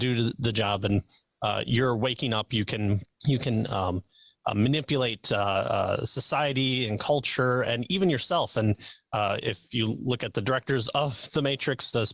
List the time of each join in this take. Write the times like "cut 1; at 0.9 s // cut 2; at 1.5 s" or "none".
cut 1; at 3.1 s

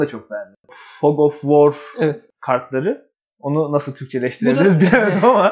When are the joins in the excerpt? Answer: none

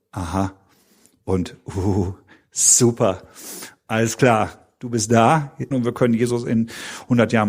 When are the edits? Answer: cut 1; at 2.4 s // cut 2; at 5.7 s

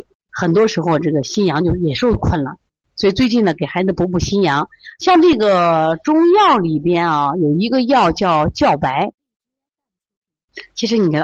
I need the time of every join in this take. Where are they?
none

